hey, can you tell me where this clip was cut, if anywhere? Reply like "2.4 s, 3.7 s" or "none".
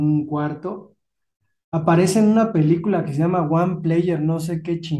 none

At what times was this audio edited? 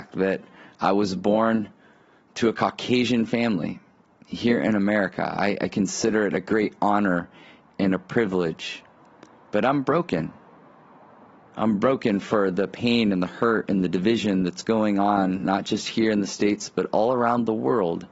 none

